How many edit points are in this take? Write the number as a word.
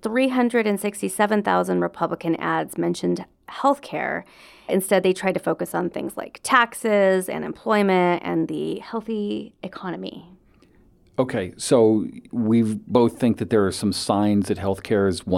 one